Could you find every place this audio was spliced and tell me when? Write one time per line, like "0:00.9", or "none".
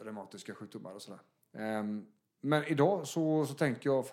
none